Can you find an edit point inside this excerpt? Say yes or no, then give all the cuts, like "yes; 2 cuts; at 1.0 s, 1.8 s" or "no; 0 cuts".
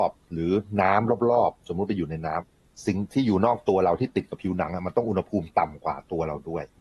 no; 0 cuts